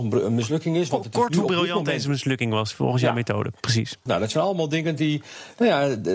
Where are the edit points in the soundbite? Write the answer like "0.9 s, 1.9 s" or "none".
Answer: 4.1 s